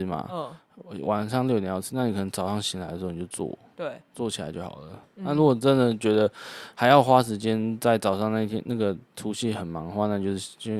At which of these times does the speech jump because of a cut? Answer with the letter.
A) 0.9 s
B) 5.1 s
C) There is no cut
C